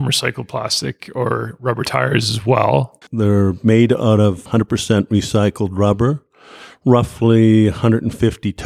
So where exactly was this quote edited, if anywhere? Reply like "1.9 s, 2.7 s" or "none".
3.0 s